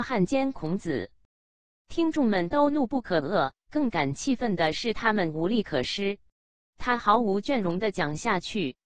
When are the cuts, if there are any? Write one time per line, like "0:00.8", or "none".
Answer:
0:06.7